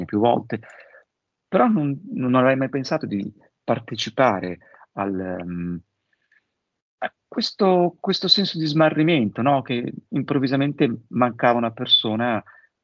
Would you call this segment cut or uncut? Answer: uncut